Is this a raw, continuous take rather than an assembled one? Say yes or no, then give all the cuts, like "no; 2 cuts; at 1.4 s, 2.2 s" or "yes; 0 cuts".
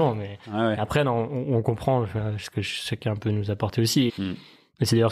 no; 1 cut; at 4.1 s